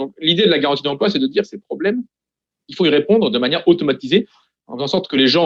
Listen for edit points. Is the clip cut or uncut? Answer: uncut